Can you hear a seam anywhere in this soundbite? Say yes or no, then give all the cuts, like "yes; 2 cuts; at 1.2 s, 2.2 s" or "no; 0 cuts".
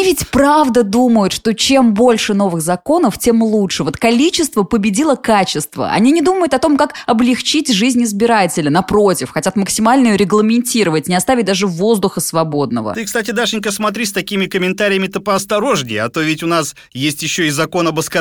no; 0 cuts